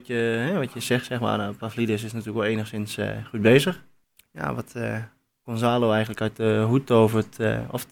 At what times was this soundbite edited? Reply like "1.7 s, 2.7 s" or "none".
none